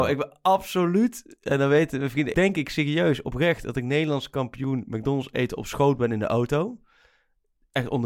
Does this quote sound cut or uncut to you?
cut